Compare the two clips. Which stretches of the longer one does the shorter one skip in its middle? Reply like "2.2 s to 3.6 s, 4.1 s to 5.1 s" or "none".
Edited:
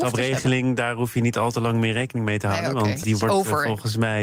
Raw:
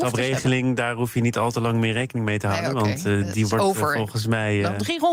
3.0 s to 3.3 s